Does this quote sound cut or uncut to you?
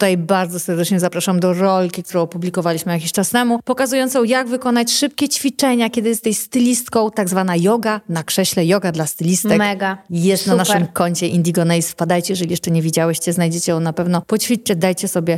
uncut